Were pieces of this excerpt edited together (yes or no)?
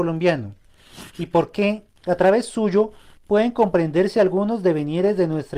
no